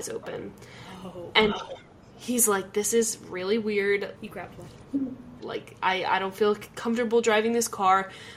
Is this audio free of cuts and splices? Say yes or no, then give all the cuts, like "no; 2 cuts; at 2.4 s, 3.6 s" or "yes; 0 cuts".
no; 2 cuts; at 4.2 s, 5.4 s